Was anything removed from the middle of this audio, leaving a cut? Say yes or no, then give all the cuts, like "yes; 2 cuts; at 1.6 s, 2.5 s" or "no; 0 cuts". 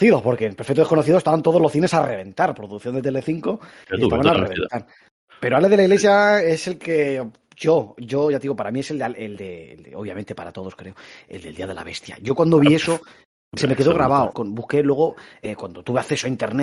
yes; 1 cut; at 14.3 s